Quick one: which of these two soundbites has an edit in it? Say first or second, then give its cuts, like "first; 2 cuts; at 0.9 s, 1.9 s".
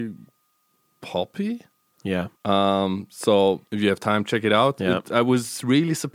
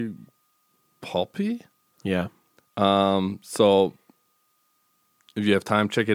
first; 2 cuts; at 2.3 s, 3.7 s